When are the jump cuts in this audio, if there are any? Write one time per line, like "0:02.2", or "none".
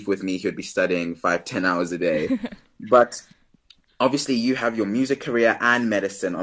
none